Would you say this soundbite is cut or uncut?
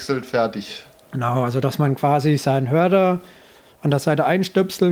uncut